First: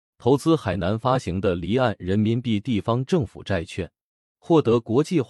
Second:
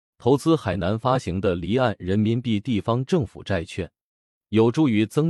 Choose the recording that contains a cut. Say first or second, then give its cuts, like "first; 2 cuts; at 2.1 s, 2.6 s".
first; 1 cut; at 4.3 s